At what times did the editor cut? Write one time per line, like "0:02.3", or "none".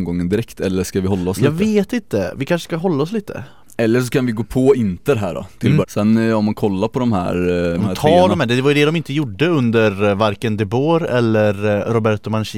0:05.8
0:07.8